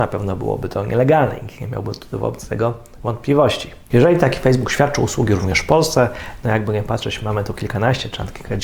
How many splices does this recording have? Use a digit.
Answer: 1